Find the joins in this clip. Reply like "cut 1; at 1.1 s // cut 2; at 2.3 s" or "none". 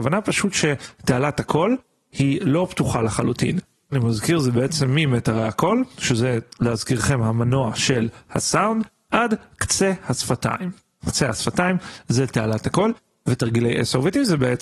cut 1; at 3.9 s